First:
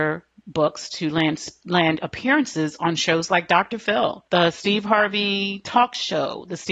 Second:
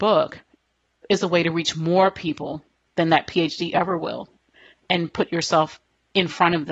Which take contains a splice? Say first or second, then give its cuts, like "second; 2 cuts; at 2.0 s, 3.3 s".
first; 1 cut; at 4.3 s